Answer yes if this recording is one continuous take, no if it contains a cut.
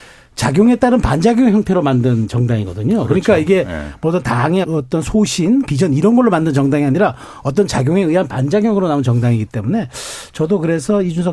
no